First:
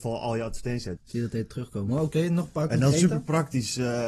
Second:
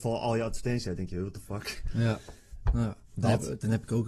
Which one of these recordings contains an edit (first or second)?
first